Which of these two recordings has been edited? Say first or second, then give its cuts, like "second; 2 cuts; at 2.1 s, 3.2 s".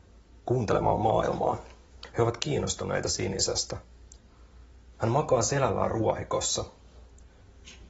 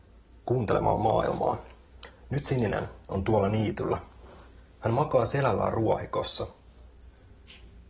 first; 2 cuts; at 2.1 s, 4.9 s